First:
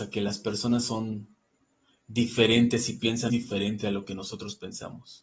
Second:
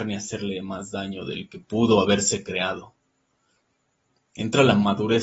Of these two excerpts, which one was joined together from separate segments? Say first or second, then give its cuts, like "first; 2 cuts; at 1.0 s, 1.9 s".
first; 1 cut; at 3.3 s